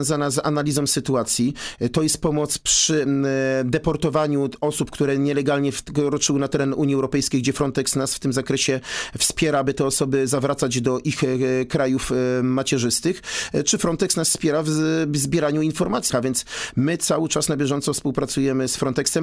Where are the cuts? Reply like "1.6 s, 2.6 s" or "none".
16.1 s